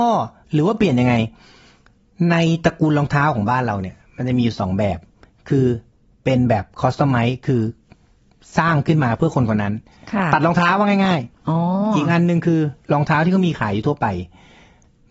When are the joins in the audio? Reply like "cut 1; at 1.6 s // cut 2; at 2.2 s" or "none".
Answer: none